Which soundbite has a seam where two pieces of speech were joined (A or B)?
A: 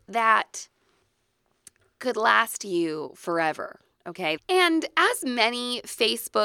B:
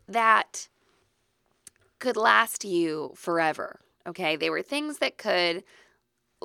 A